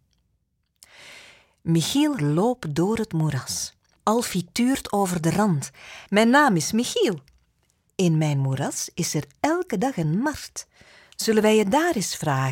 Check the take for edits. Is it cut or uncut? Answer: cut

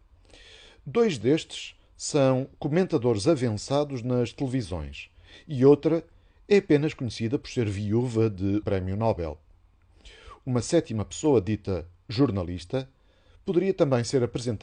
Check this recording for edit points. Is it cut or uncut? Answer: cut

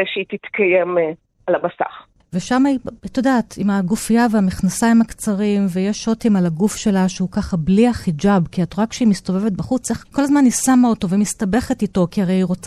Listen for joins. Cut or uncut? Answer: cut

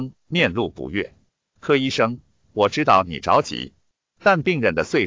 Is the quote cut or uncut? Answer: uncut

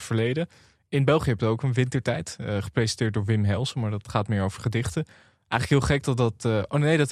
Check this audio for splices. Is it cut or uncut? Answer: uncut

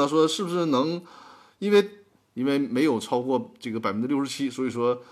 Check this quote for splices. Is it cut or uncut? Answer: cut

